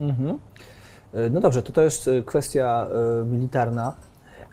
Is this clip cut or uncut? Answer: uncut